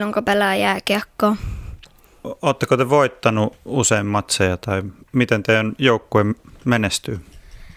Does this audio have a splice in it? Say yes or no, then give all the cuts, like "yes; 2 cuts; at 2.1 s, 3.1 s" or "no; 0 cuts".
no; 0 cuts